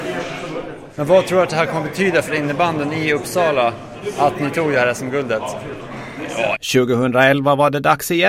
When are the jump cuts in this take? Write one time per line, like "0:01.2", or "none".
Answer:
0:01.0
0:06.5

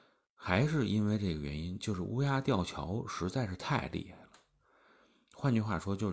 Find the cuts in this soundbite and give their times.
none

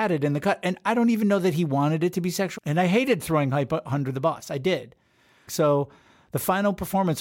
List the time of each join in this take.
0:02.6
0:05.5

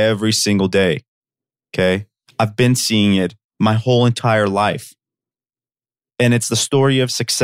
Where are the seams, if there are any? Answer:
none

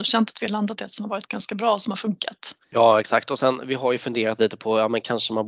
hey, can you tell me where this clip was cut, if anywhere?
0:02.6

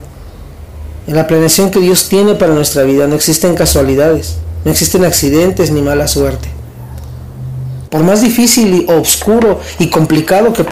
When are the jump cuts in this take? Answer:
0:07.9

